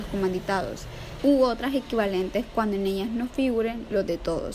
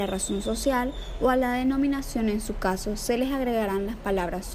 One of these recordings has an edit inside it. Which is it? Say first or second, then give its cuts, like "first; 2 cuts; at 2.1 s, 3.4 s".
first; 1 cut; at 1.2 s